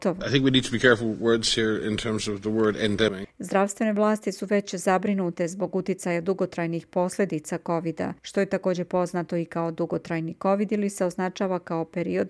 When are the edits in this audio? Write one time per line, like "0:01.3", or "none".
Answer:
0:03.2
0:08.2